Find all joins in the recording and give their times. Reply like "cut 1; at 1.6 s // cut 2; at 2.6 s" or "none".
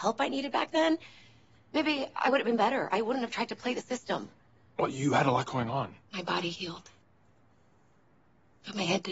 cut 1; at 6.1 s

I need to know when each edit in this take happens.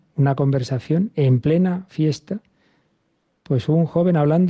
none

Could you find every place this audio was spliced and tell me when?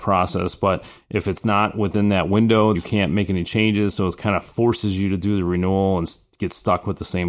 cut 1; at 2.8 s

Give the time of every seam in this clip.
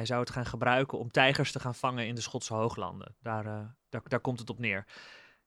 none

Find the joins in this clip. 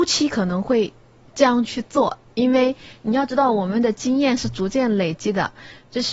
none

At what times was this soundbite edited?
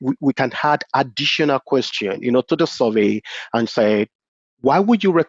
none

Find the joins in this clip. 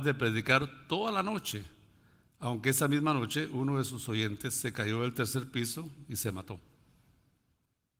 none

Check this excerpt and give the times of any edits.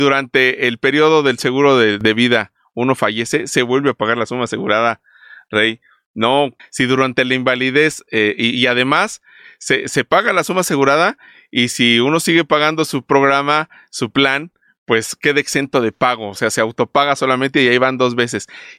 cut 1; at 6.6 s

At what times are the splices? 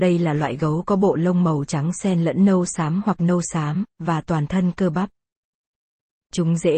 cut 1; at 3.9 s

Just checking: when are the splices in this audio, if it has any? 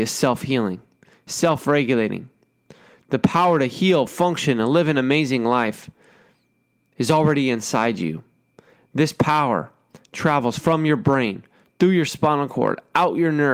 none

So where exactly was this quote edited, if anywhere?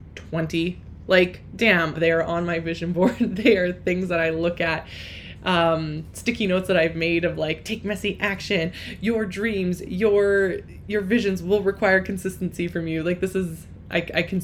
cut 1; at 1.9 s

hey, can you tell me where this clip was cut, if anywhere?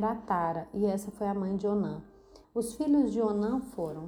cut 1; at 2.4 s

